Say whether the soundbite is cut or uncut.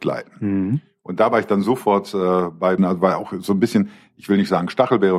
cut